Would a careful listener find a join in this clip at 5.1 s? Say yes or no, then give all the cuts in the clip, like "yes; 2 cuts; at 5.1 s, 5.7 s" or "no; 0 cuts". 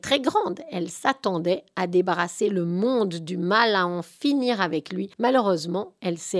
yes; 1 cut; at 5.1 s